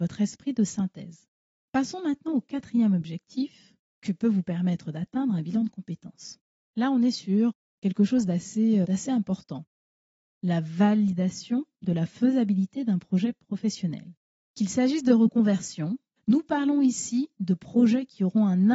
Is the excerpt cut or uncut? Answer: cut